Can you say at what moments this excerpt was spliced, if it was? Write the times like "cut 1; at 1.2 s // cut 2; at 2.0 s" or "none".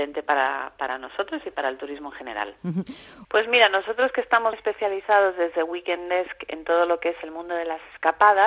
cut 1; at 3.2 s // cut 2; at 4.5 s